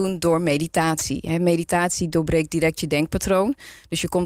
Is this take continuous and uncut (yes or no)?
yes